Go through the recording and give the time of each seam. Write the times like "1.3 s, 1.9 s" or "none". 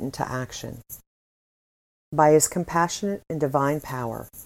none